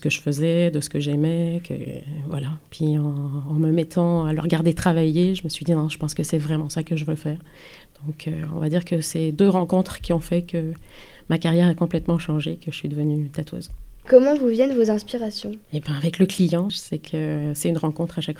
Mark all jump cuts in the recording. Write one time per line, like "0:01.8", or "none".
0:14.1
0:15.6
0:16.7